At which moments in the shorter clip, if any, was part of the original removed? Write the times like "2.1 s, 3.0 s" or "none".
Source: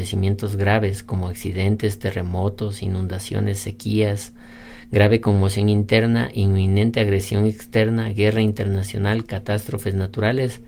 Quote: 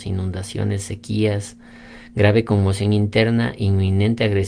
none